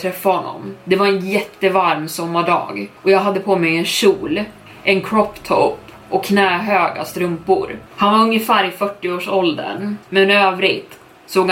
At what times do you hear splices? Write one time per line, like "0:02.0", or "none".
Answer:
0:03.0
0:07.9
0:10.0